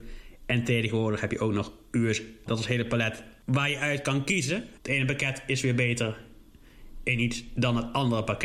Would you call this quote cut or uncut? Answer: cut